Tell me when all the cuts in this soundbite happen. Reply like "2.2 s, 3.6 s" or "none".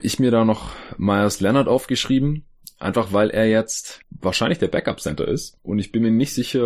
none